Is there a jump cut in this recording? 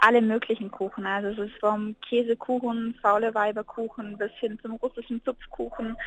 yes; 1 cut; at 1.6 s

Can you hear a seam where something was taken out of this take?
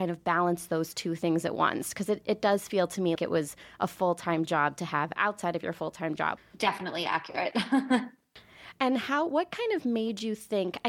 yes; 2 cuts; at 3.2 s, 6.4 s

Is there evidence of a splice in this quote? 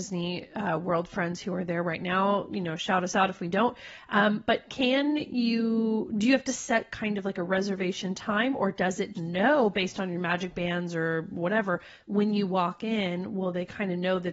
yes; 1 cut; at 9.1 s

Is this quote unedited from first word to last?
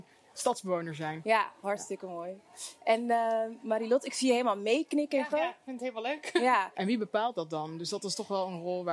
no; 2 cuts; at 5.3 s, 6.7 s

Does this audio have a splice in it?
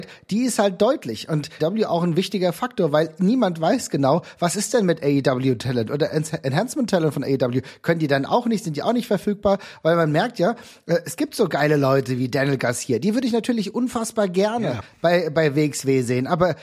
yes; 1 cut; at 1.6 s

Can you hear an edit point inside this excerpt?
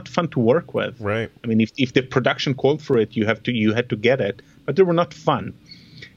no; 0 cuts

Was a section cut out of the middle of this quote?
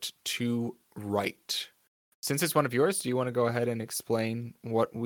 yes; 1 cut; at 2.1 s

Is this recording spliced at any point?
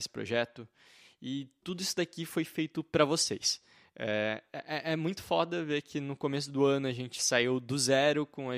no; 0 cuts

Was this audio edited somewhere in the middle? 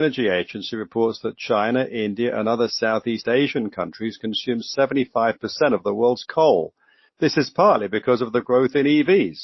yes; 1 cut; at 7.1 s

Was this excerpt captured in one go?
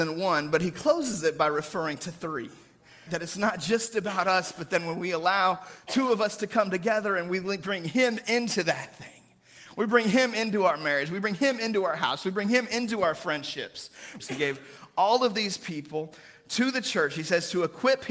no; 2 cuts; at 3.1 s, 14.2 s

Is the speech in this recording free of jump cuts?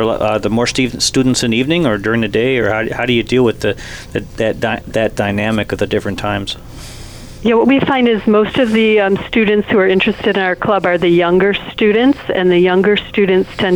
yes; 0 cuts

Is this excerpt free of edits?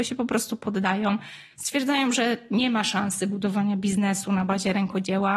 yes; 0 cuts

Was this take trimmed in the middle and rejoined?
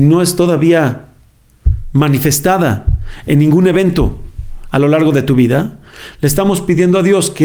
no; 0 cuts

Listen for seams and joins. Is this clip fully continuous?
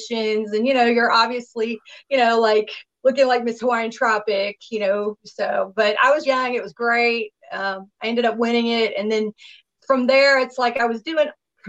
no; 1 cut; at 6.3 s

